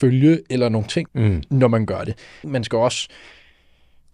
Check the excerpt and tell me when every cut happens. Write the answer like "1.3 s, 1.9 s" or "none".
1.1 s, 2.4 s